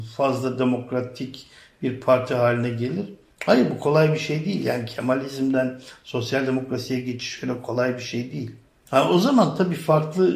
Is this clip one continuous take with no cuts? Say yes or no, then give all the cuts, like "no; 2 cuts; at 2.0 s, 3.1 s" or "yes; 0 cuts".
yes; 0 cuts